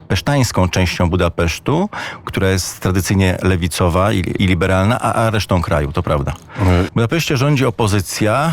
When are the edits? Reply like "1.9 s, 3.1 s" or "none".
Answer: 4.4 s, 6.9 s

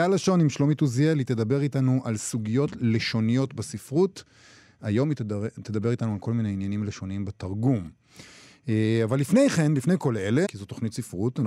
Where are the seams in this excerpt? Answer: 10.4 s

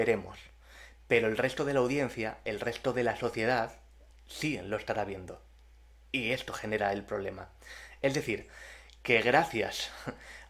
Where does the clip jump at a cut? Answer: none

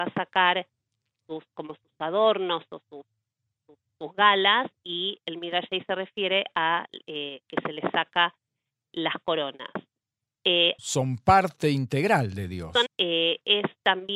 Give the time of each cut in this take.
10.8 s, 12.9 s

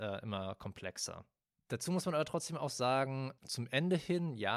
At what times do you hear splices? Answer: 3.4 s

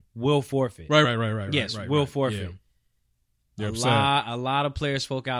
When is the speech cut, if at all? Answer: 1.0 s, 3.5 s

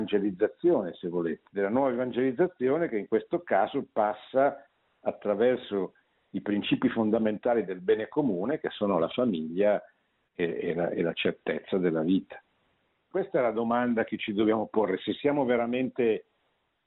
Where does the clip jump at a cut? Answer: 13.1 s

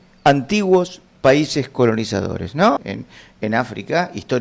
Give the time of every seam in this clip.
2.8 s

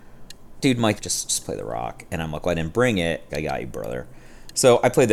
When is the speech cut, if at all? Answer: 1.0 s, 3.3 s

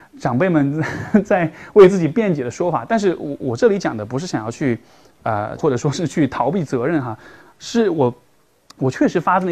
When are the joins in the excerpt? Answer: 5.6 s

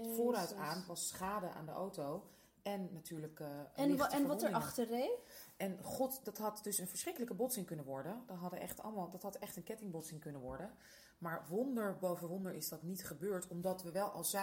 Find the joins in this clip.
none

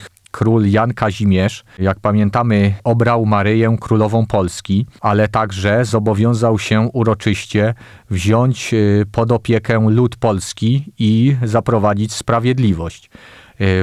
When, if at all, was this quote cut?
none

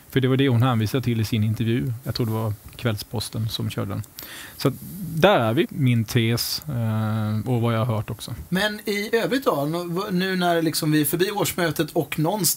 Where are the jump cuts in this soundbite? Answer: 2.0 s, 5.6 s, 8.5 s

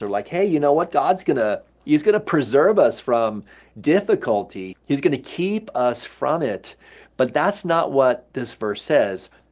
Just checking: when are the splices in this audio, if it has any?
4.7 s

